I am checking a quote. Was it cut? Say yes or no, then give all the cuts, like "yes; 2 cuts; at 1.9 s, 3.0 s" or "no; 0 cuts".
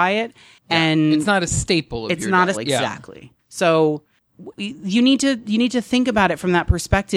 yes; 2 cuts; at 2.5 s, 4.6 s